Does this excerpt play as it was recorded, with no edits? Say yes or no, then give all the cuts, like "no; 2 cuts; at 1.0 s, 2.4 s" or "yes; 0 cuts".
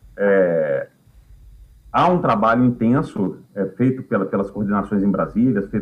yes; 0 cuts